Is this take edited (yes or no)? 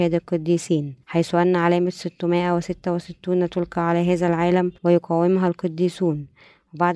yes